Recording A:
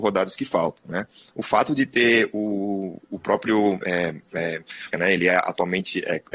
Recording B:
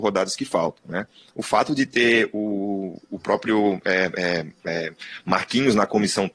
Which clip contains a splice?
A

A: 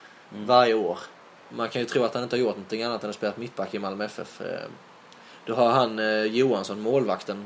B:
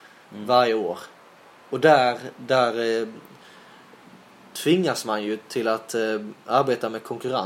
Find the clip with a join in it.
A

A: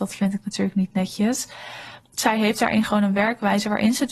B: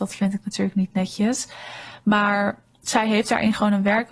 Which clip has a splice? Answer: A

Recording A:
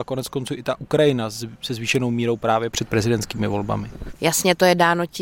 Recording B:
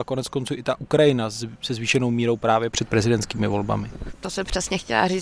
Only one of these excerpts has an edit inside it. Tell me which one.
A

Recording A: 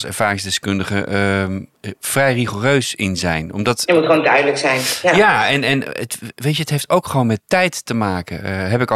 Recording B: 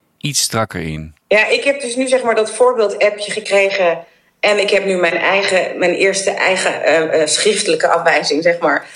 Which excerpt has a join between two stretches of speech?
B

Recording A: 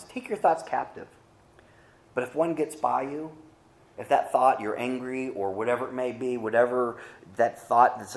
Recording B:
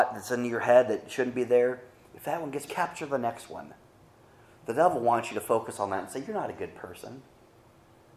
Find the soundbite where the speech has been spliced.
B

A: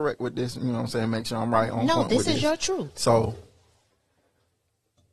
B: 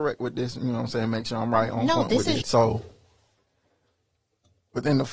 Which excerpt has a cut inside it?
B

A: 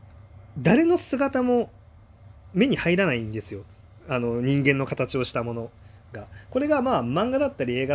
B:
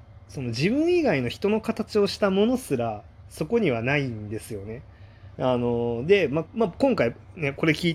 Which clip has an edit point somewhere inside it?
B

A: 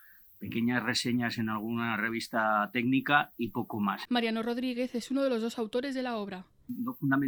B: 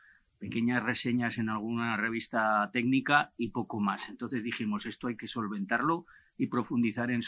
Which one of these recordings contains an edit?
A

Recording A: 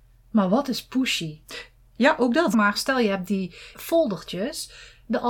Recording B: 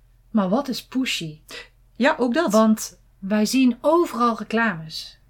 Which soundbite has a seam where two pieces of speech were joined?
A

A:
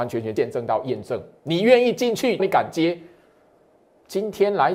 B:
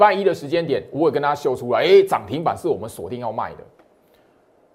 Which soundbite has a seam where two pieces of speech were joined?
A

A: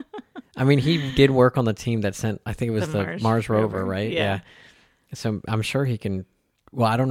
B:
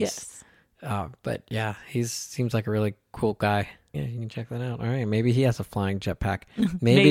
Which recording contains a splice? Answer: B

